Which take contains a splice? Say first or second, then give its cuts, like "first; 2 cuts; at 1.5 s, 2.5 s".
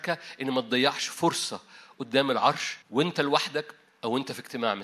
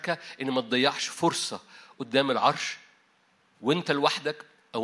first; 1 cut; at 2.8 s